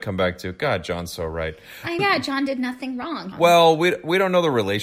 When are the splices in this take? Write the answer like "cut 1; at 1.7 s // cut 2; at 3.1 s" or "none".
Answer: cut 1; at 2.0 s // cut 2; at 3.3 s